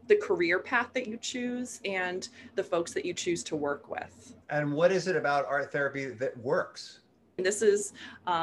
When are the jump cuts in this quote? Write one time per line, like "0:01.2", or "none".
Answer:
0:04.4
0:07.4